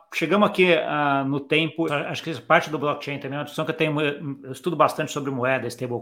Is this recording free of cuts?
no; 1 cut; at 1.9 s

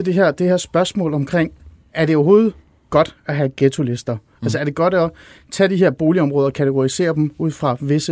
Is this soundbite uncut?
yes; 0 cuts

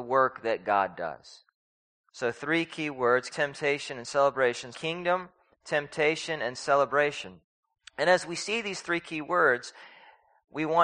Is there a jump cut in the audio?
yes; 2 cuts; at 3.3 s, 4.7 s

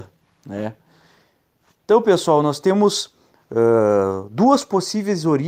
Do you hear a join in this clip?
no; 0 cuts

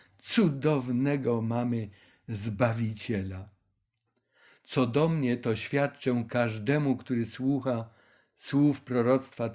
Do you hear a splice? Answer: no; 0 cuts

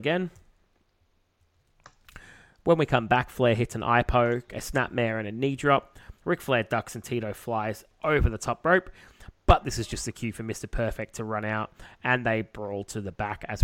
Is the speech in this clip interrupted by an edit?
yes; 1 cut; at 6.2 s

